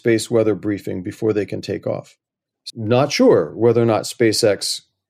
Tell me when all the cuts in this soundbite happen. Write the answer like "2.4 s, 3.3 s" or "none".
2.7 s